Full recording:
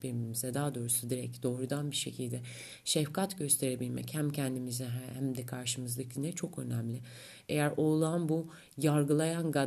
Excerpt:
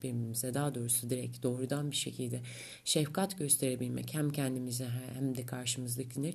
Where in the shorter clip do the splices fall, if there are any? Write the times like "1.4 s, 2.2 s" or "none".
none